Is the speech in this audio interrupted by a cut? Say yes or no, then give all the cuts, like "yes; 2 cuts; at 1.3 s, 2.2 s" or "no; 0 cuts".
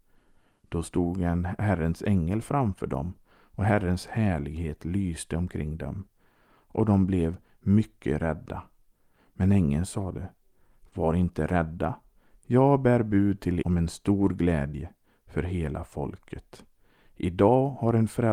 yes; 1 cut; at 13.6 s